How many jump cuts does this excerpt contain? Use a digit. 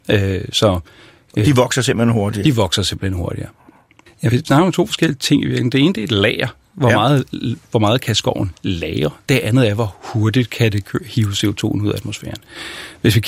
1